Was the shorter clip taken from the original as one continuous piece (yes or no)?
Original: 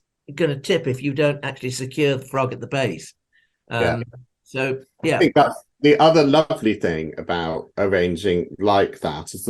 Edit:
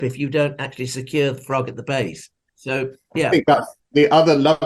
no